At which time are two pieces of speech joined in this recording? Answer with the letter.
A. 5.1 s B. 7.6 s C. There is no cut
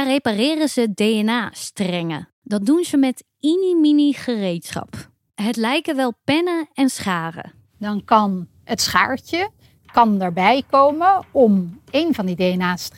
C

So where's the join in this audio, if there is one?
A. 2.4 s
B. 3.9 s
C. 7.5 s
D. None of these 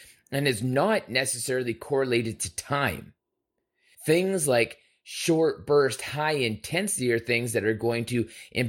B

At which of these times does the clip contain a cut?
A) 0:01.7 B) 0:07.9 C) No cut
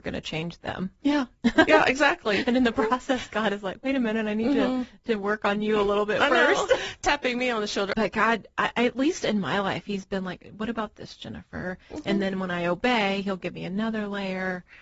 B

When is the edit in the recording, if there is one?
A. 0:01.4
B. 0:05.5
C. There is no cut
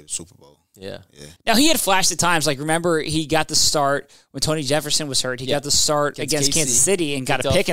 A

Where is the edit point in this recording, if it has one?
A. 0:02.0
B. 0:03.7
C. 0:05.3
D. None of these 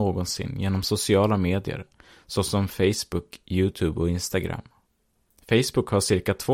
C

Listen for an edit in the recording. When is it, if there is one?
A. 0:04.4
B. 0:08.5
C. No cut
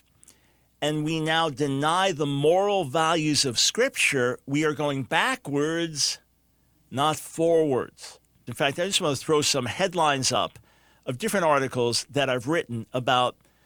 B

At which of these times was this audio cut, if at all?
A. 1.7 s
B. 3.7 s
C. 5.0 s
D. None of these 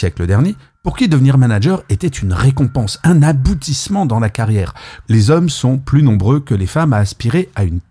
C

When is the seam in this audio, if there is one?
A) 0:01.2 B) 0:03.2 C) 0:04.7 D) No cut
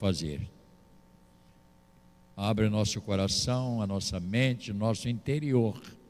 D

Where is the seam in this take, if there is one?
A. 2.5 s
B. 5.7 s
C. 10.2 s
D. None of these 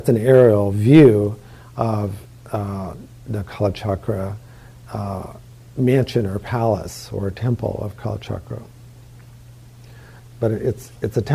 C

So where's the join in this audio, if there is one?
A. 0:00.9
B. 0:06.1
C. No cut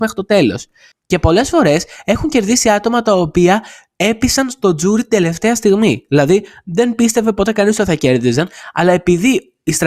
A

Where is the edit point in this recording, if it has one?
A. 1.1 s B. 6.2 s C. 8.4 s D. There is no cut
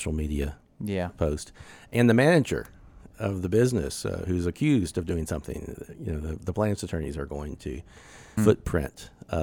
C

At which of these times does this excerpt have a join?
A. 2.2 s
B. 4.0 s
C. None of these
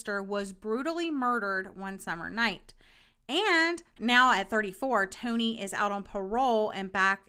B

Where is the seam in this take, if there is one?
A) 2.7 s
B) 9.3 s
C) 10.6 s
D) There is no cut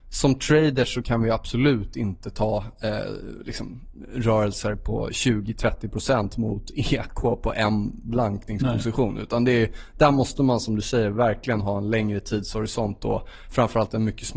D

